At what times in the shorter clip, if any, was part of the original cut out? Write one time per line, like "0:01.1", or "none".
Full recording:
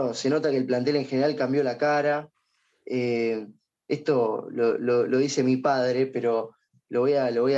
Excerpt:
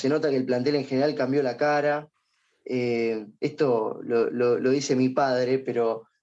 0:03.4